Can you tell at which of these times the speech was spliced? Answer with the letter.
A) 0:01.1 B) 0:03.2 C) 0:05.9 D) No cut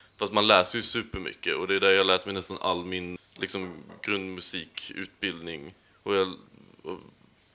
B